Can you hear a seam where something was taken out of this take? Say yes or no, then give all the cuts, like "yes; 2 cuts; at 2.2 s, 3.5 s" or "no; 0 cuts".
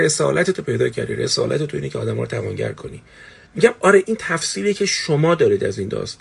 yes; 1 cut; at 3.5 s